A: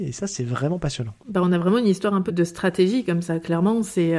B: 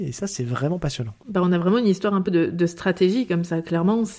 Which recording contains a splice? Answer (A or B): A